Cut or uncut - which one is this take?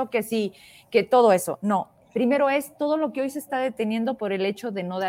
uncut